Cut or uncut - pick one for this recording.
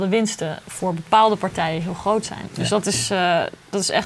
uncut